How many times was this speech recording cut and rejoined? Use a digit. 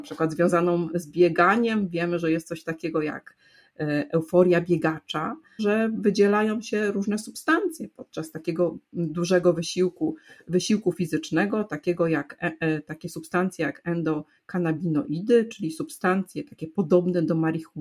1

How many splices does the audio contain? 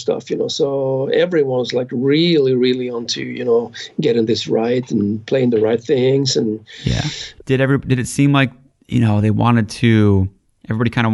1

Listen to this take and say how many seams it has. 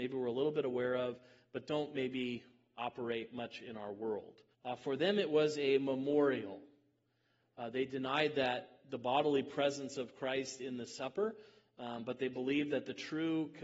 1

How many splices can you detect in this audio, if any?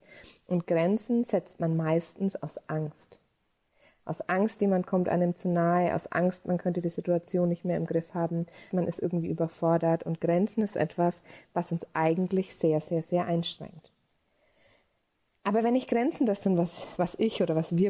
1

